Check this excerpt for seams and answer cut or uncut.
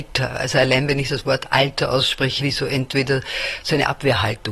cut